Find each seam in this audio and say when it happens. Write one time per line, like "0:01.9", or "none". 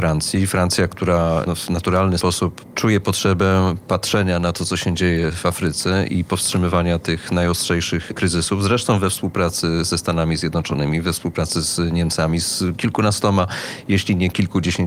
0:02.2